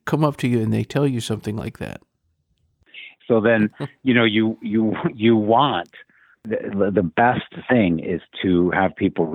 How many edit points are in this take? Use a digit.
1